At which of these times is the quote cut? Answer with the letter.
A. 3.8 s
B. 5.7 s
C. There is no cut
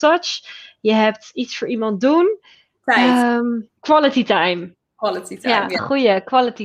A